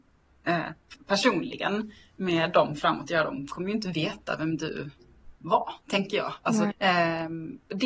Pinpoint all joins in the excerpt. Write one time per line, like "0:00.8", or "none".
0:05.3
0:06.7